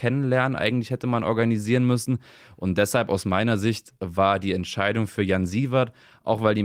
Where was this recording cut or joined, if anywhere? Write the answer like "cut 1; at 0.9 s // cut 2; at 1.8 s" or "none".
none